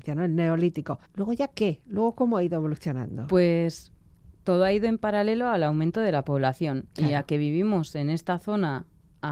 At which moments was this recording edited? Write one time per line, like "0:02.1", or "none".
0:01.0